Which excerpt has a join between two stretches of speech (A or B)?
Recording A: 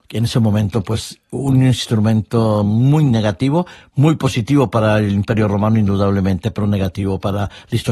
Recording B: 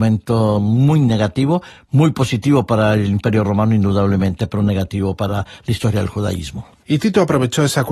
B